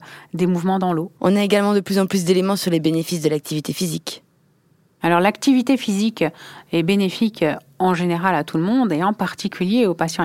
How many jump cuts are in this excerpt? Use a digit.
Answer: 1